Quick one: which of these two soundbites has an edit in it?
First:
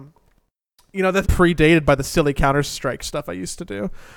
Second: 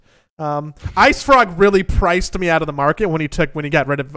first; 1 cut; at 1.2 s

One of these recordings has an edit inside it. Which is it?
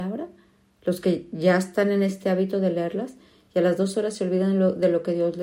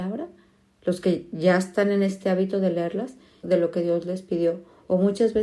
second; 1 cut; at 3.4 s

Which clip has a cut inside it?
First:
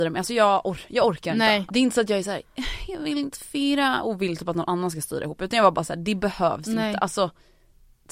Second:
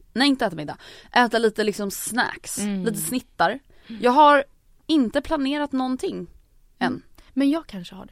first; 1 cut; at 1.7 s

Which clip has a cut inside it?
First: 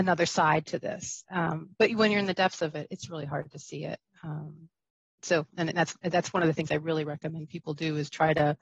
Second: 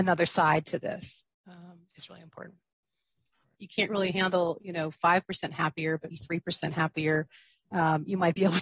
second; 3 cuts; at 1.3 s, 3.5 s, 6.1 s

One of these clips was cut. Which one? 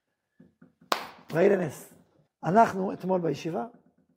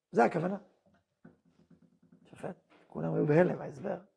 first; 1 cut; at 2.3 s

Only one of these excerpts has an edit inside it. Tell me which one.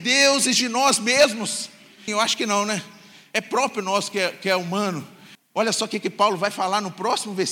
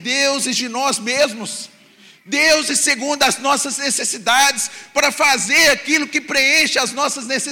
first; 2 cuts; at 2.1 s, 5.3 s

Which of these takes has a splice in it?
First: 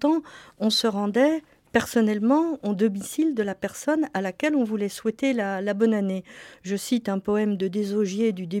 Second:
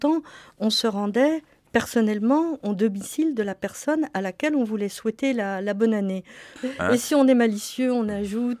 second; 1 cut; at 6.6 s

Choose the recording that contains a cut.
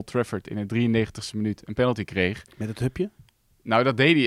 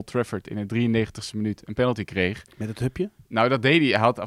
second; 1 cut; at 3.3 s

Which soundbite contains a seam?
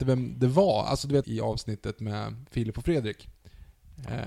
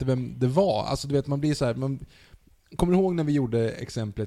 first; 1 cut; at 1.2 s

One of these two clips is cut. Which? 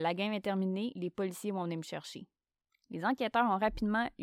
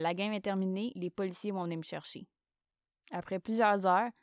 first; 1 cut; at 2.7 s

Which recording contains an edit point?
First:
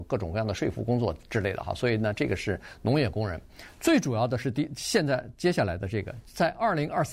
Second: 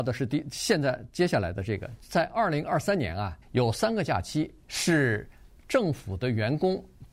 second; 2 cuts; at 3.4 s, 4.6 s

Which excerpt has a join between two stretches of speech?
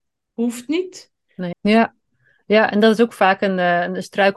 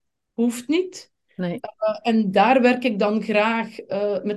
first; 1 cut; at 1.5 s

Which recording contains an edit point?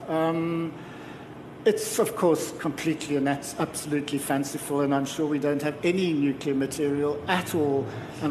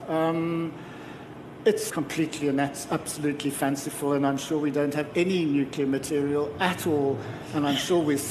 second; 1 cut; at 1.9 s

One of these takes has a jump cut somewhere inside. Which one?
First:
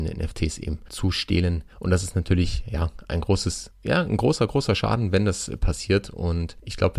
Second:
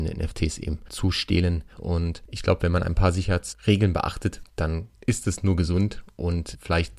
second; 1 cut; at 1.8 s

